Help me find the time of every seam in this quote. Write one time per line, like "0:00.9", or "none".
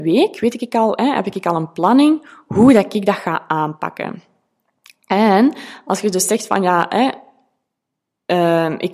none